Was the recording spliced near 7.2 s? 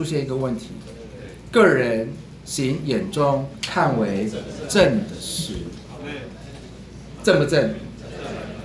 yes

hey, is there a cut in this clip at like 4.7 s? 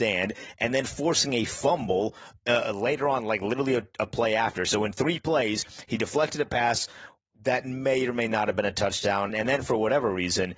no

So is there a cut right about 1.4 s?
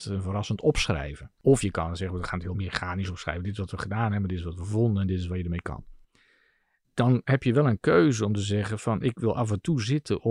no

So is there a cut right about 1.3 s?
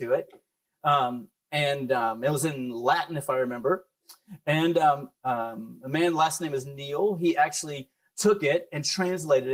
no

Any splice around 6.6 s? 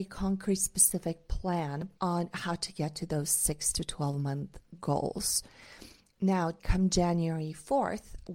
yes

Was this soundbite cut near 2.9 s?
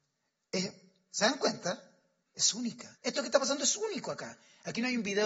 yes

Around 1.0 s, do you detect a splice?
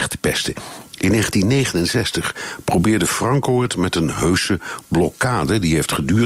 no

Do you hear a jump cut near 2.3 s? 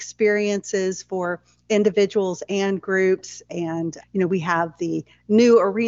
no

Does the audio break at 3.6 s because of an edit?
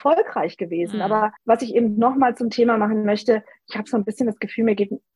no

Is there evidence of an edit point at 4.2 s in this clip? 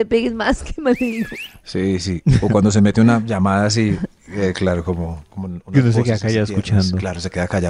no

